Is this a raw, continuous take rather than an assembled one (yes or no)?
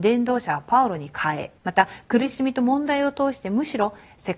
no